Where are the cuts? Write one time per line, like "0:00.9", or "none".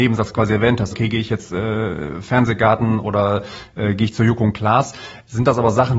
0:00.9